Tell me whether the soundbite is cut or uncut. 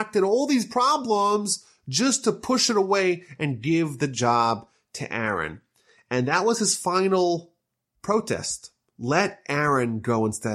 uncut